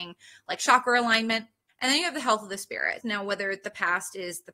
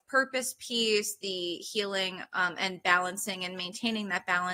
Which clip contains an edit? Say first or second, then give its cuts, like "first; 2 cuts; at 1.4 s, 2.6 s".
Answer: first; 2 cuts; at 1.7 s, 3.0 s